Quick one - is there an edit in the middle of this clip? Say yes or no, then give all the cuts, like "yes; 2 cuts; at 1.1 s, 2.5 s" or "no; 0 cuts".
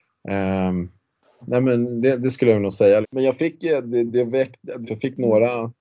yes; 3 cuts; at 1.4 s, 3.0 s, 4.9 s